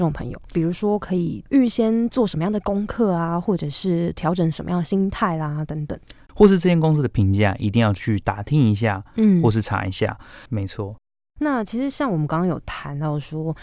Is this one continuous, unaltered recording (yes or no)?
no